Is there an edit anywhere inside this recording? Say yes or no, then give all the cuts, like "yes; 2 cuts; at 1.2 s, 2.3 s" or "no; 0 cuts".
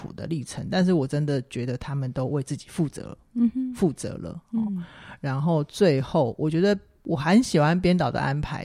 no; 0 cuts